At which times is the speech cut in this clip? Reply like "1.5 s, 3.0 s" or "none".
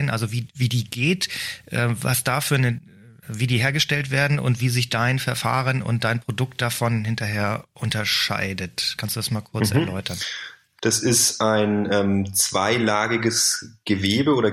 10.8 s